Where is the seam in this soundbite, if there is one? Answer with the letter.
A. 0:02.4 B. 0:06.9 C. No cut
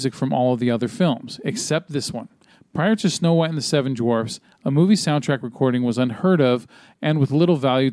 C